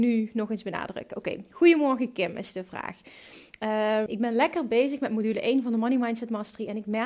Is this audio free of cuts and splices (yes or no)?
no